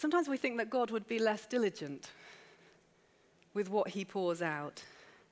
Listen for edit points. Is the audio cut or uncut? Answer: uncut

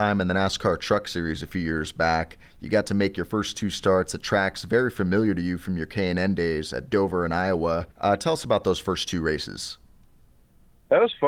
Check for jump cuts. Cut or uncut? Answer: uncut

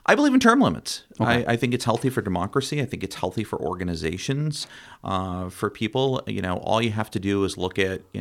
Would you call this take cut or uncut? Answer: uncut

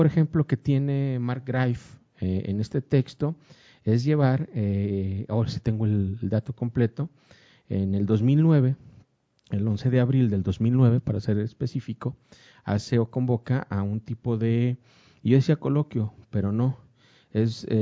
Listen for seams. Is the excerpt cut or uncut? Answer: uncut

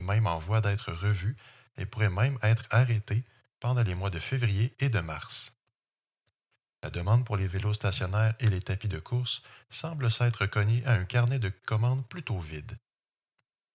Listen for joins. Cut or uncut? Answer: uncut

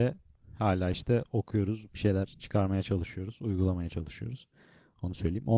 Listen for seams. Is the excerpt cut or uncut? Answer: cut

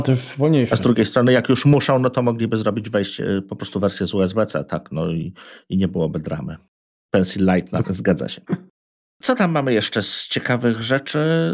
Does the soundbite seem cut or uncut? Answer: cut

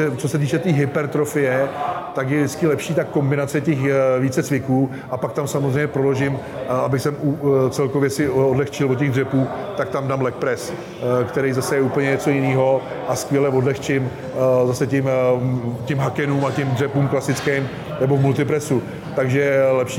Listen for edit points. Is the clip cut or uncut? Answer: uncut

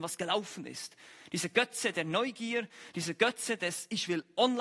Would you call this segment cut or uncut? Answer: uncut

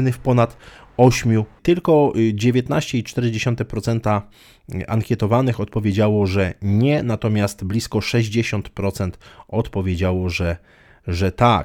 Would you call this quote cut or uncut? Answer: cut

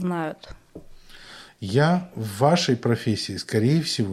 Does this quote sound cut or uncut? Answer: cut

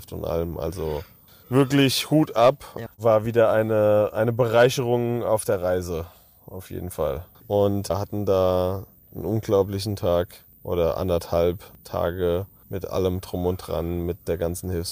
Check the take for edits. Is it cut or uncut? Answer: cut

